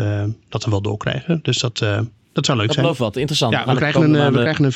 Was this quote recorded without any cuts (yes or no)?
yes